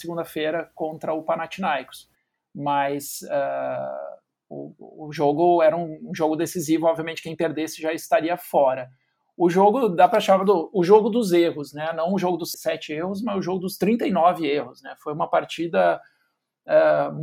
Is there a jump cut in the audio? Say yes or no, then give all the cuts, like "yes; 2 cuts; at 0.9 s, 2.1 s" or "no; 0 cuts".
yes; 1 cut; at 12.5 s